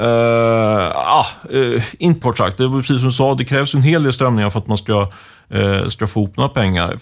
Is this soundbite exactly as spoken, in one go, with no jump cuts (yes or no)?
no